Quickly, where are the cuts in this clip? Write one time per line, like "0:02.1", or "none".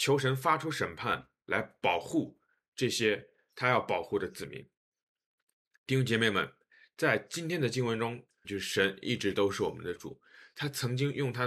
0:08.4